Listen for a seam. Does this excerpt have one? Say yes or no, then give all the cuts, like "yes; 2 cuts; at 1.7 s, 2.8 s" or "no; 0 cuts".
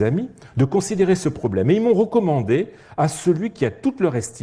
no; 0 cuts